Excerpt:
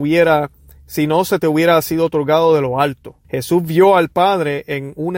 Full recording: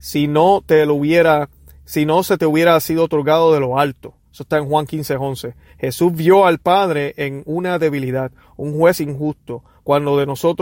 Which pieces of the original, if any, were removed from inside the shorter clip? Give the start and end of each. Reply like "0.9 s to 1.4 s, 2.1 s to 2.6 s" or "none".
4.2 s to 5.7 s